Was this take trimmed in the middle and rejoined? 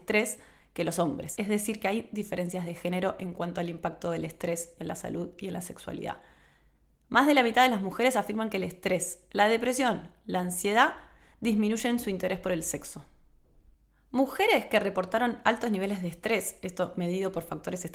no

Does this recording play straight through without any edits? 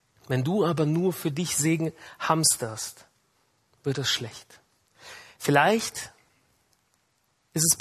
yes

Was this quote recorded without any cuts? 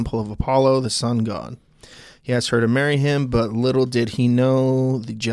yes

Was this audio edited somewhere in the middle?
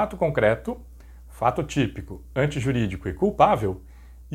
no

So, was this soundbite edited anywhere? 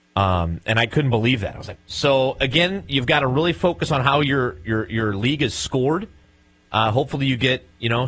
yes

